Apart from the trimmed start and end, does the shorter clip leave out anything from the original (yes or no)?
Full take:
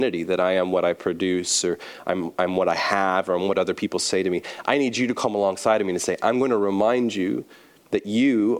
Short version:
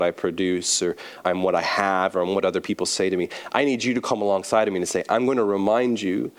yes